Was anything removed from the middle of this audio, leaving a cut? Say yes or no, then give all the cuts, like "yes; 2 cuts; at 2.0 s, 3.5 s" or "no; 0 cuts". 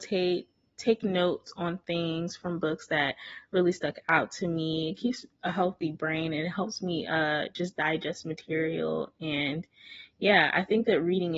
no; 0 cuts